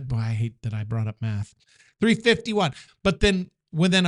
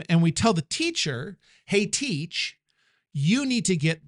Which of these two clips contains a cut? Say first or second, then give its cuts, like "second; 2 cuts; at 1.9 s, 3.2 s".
first; 1 cut; at 2.9 s